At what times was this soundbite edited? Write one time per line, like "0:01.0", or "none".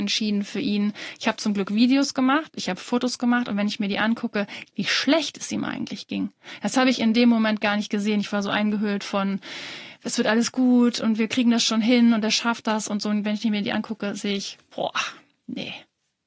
0:04.7